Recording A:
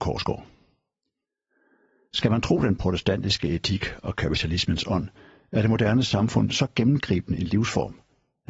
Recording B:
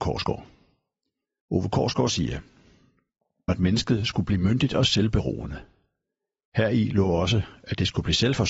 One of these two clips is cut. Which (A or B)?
B